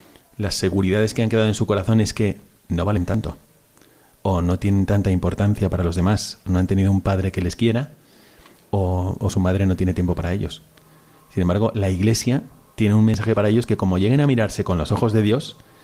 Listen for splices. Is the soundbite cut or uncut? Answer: uncut